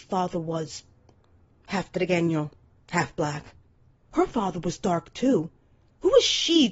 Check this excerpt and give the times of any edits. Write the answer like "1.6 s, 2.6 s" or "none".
none